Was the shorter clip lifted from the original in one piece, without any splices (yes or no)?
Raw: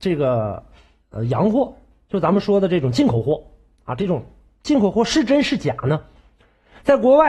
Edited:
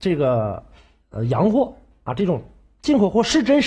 no